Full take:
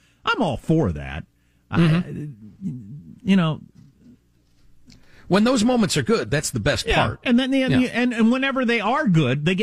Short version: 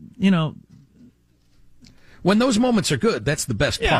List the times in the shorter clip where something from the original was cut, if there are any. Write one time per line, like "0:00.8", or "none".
none